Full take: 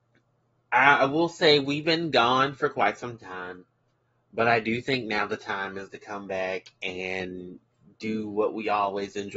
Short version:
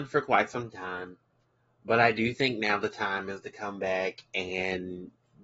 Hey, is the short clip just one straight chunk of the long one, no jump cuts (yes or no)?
yes